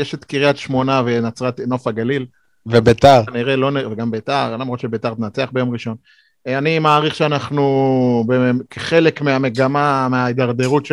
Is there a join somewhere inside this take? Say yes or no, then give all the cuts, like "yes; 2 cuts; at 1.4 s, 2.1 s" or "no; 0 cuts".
no; 0 cuts